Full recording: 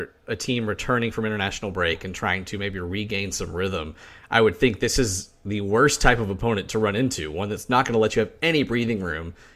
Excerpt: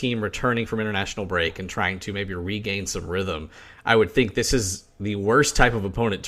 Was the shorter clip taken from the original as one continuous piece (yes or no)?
yes